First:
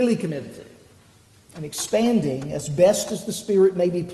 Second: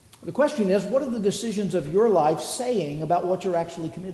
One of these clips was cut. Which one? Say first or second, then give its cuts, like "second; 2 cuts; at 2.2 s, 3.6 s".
first; 1 cut; at 1.4 s